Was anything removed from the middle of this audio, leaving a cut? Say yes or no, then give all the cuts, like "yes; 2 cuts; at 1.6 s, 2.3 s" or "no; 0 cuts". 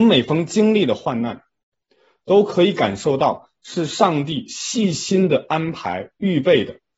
no; 0 cuts